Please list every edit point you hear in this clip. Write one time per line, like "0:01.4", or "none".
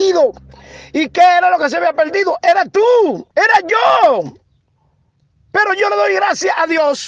0:03.3